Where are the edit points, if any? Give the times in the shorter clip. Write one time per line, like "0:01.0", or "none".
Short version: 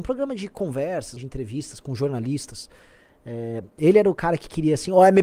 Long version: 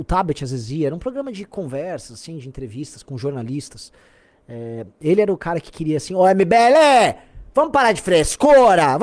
0:01.2